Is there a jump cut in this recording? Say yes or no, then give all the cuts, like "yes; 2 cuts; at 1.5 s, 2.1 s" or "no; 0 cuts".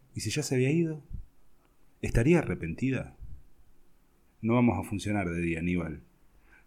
yes; 2 cuts; at 1.9 s, 4.3 s